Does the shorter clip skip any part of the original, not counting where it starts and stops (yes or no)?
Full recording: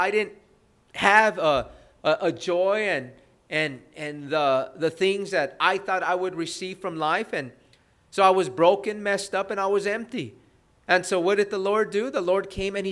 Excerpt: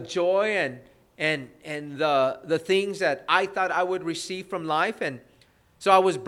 no